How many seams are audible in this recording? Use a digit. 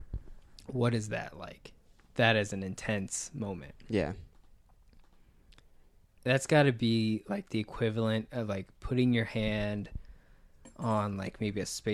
0